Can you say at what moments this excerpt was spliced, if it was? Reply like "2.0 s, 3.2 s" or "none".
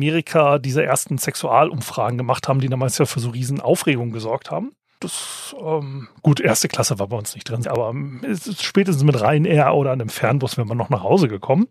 5.0 s, 7.6 s